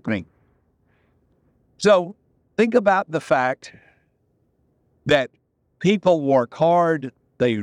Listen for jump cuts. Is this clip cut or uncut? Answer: uncut